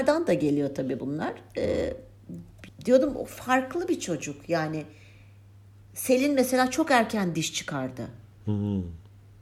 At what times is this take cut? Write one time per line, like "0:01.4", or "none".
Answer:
0:02.7